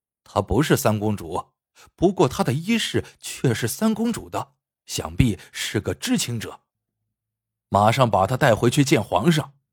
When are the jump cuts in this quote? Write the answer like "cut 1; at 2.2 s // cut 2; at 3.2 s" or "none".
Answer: none